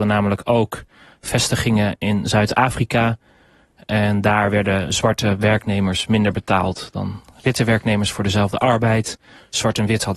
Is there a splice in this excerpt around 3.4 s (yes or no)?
no